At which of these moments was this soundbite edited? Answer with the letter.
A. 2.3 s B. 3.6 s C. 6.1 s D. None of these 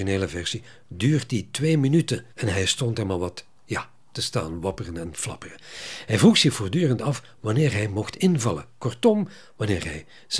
A